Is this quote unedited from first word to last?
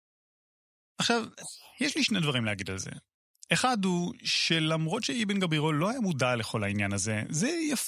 yes; 0 cuts

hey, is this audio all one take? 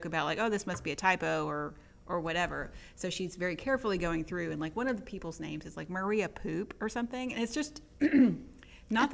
yes; 0 cuts

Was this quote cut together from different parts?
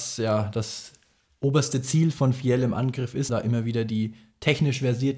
yes; 1 cut; at 3.3 s

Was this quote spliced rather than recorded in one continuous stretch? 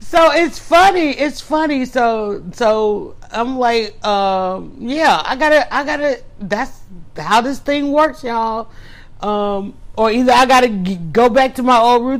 no; 0 cuts

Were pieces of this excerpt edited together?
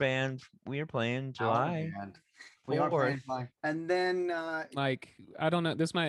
yes; 2 cuts; at 3.6 s, 4.7 s

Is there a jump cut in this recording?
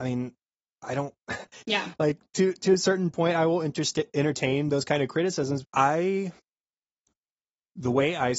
yes; 2 cuts; at 1.6 s, 5.6 s

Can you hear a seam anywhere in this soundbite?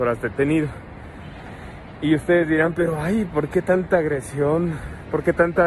no; 0 cuts

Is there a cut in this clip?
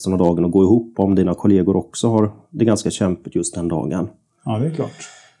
no; 0 cuts

